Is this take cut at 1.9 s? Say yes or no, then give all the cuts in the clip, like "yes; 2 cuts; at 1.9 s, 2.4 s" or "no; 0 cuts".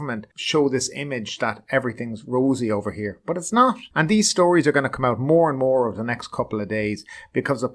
no; 1 cut; at 3.9 s